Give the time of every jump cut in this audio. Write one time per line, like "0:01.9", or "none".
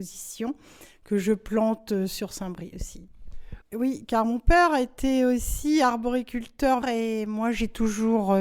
0:03.6
0:06.8